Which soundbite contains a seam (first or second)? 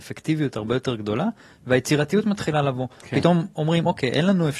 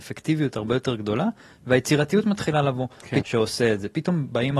second